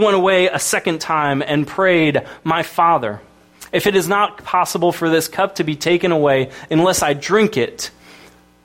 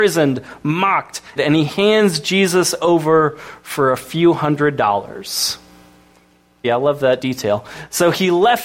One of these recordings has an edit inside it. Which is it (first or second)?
second